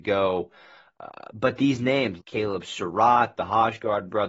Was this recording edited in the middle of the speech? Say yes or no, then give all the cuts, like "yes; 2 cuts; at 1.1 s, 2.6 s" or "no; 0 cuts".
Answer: yes; 2 cuts; at 2.2 s, 3.4 s